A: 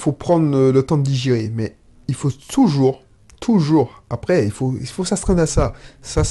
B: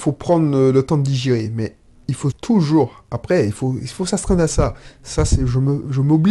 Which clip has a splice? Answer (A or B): B